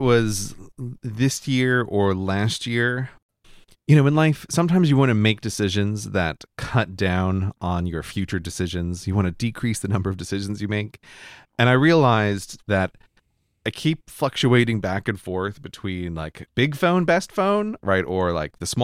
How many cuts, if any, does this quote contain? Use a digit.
0